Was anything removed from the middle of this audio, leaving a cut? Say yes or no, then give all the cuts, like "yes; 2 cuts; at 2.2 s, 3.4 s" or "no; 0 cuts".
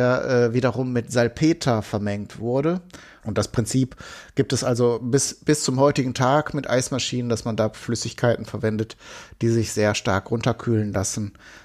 yes; 1 cut; at 3.2 s